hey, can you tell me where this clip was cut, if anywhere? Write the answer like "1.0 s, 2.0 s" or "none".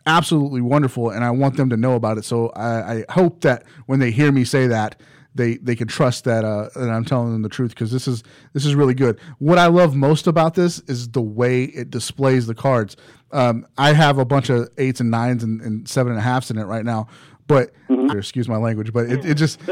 18.1 s